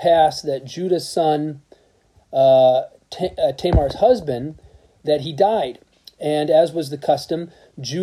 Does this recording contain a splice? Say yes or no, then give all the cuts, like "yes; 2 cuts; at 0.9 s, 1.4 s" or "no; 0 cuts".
no; 0 cuts